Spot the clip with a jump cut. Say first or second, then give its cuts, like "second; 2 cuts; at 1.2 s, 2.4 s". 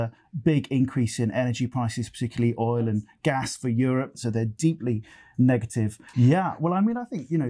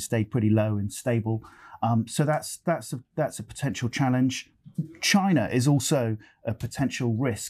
first; 2 cuts; at 4.1 s, 6.1 s